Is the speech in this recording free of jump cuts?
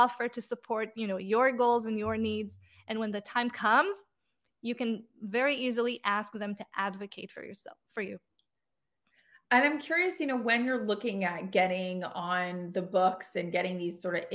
yes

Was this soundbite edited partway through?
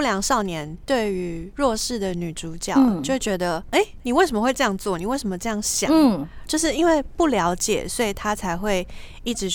no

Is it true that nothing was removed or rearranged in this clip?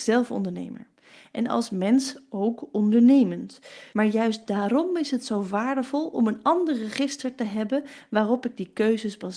no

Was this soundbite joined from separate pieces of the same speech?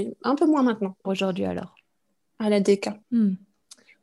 yes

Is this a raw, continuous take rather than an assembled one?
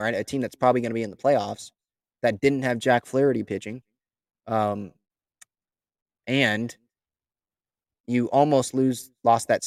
yes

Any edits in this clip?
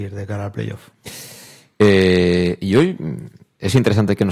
no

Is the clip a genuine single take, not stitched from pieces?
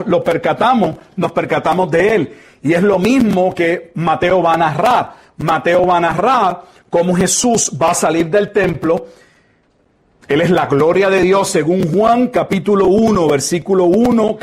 yes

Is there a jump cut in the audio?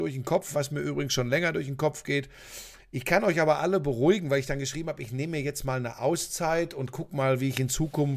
yes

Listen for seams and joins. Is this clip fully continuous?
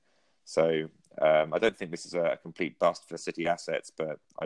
yes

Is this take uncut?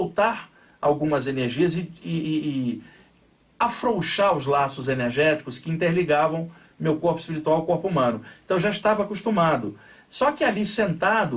yes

